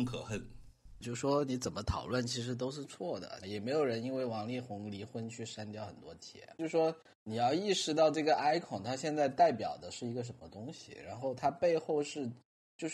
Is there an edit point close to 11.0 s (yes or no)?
no